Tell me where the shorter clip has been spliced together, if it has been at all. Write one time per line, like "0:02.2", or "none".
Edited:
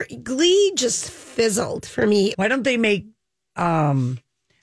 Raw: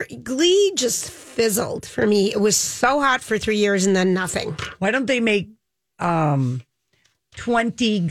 0:02.3